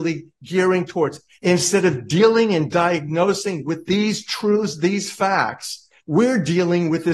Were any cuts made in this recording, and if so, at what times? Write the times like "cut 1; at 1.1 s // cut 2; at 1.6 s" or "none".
cut 1; at 1.3 s // cut 2; at 6.0 s